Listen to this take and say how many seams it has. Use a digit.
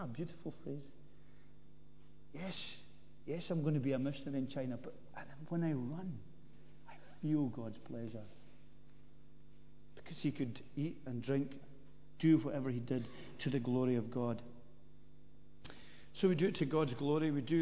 0